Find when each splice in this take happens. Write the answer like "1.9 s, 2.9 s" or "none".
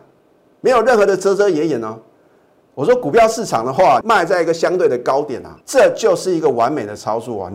2.6 s, 4.0 s, 5.6 s